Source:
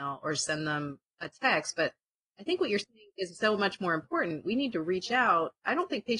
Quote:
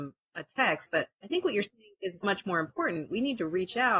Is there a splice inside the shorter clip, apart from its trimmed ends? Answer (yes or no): yes